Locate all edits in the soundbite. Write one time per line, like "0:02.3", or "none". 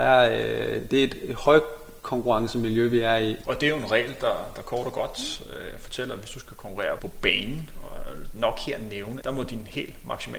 0:03.4
0:07.0
0:09.2